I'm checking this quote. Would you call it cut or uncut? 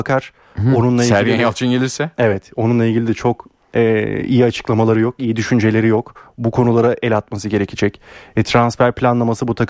uncut